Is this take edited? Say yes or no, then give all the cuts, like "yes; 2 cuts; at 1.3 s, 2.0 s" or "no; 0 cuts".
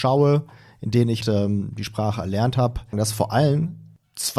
yes; 2 cuts; at 1.2 s, 2.9 s